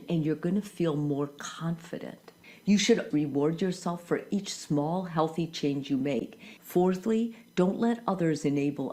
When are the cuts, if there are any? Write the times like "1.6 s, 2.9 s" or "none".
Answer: 3.1 s, 6.6 s